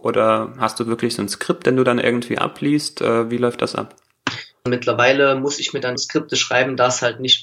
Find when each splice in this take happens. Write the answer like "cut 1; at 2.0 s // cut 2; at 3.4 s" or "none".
cut 1; at 4.7 s // cut 2; at 6.0 s